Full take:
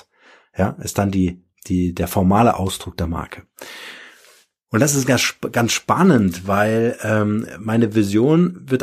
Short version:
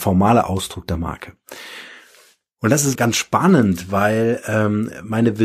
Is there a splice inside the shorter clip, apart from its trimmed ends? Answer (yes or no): yes